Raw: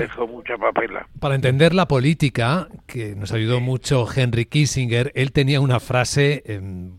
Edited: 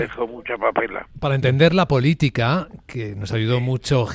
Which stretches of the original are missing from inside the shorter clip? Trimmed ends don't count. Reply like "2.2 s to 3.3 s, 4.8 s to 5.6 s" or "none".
none